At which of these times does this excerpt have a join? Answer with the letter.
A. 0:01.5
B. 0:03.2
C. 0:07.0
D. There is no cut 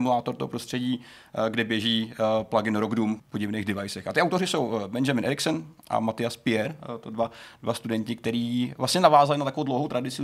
B